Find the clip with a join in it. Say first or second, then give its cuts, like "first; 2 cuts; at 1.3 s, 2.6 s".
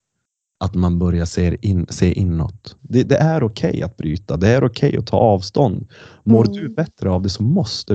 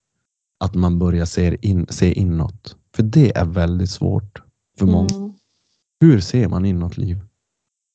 first; 1 cut; at 2.8 s